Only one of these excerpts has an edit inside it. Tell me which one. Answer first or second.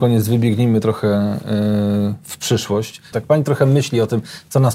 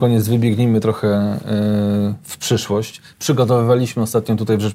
first